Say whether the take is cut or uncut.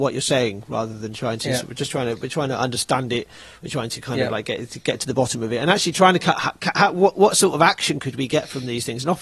uncut